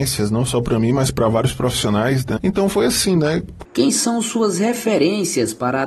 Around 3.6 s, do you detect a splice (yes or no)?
yes